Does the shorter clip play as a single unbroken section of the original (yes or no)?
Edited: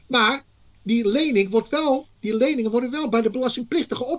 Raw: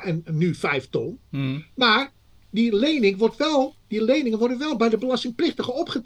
yes